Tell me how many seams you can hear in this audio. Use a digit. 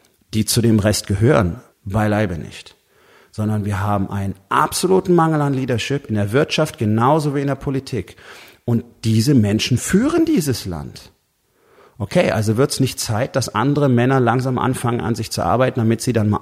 1